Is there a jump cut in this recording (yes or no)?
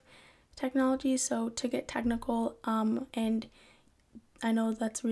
yes